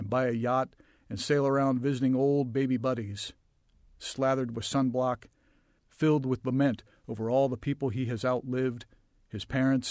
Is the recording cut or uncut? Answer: uncut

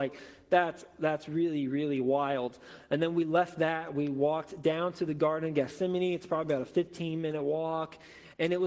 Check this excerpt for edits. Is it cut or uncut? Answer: uncut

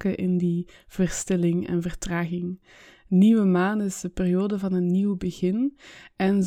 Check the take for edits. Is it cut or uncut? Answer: uncut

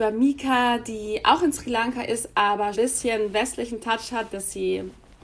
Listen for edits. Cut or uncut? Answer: cut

